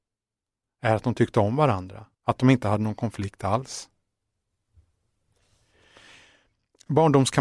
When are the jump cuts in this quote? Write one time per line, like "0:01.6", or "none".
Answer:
0:02.1